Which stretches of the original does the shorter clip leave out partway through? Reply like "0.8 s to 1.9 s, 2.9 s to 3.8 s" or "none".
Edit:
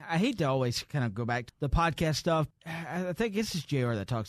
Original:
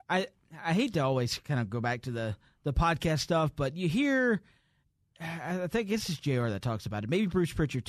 2.0 s to 2.5 s, 3.5 s to 5.0 s